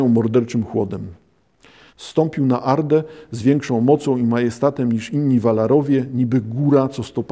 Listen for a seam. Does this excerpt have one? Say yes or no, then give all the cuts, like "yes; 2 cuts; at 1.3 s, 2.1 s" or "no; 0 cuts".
yes; 1 cut; at 1.9 s